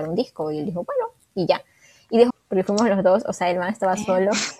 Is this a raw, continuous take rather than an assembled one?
no; 1 cut; at 2.3 s

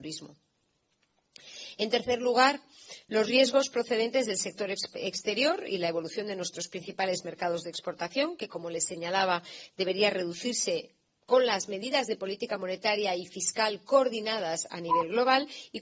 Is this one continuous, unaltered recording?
yes; 0 cuts

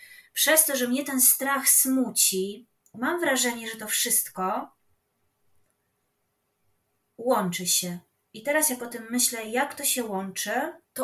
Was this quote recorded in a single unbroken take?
no; 1 cut; at 2.9 s

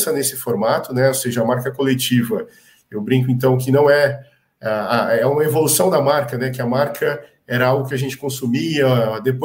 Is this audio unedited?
yes; 0 cuts

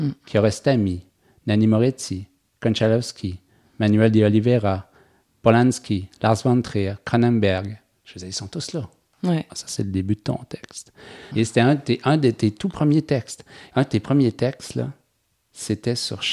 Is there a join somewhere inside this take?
yes; 3 cuts; at 9.5 s, 11.3 s, 13.7 s

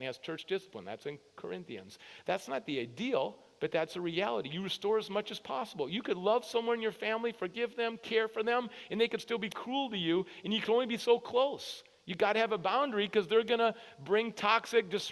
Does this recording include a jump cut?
no; 0 cuts

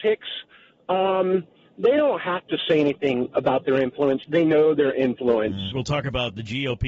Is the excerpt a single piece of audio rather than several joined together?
no; 1 cut; at 5.7 s

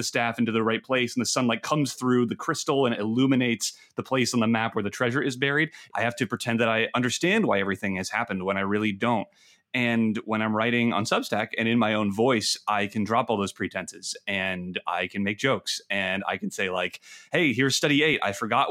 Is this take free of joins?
no; 1 cut; at 5.9 s

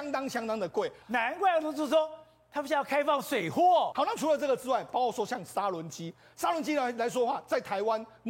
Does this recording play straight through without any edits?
no; 2 cuts; at 1.0 s, 3.9 s

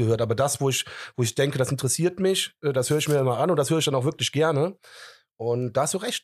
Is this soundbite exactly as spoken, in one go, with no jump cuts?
yes; 0 cuts

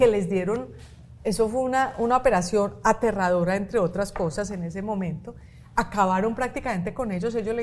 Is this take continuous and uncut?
yes; 0 cuts

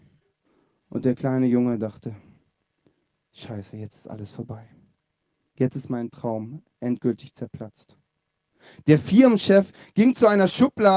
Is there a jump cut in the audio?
no; 0 cuts

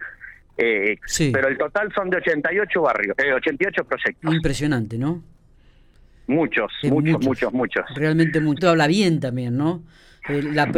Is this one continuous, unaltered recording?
no; 3 cuts; at 1.0 s, 6.8 s, 8.6 s

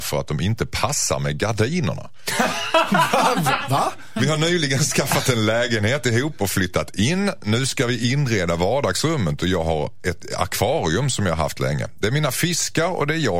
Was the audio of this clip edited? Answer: no; 0 cuts

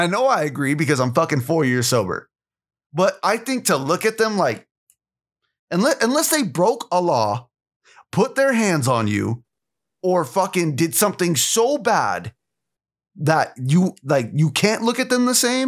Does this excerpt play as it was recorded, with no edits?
yes; 0 cuts

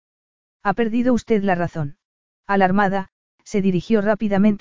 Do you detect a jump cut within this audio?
yes; 1 cut; at 2.4 s

